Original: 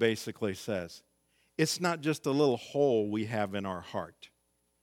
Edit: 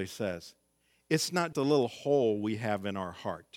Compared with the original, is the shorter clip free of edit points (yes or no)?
no